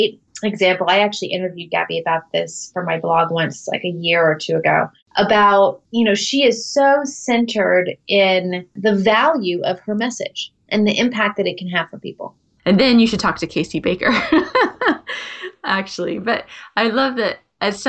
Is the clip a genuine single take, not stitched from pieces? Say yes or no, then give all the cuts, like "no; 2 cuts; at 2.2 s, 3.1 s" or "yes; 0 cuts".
no; 1 cut; at 12.6 s